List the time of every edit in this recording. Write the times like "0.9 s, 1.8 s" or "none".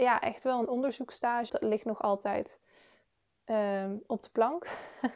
1.5 s